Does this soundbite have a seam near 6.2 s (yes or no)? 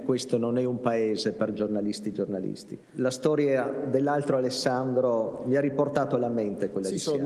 no